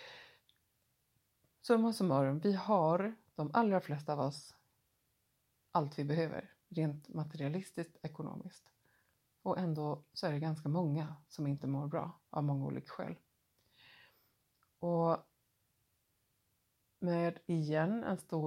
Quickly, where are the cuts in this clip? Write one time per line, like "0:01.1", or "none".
none